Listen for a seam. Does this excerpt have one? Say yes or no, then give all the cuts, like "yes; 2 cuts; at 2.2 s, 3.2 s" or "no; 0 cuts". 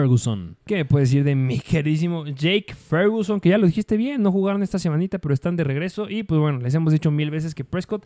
no; 0 cuts